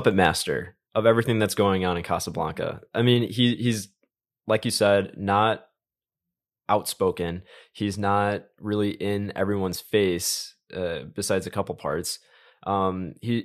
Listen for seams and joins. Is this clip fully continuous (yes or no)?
yes